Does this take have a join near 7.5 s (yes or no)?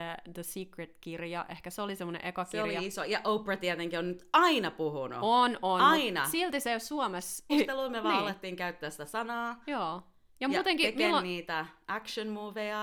yes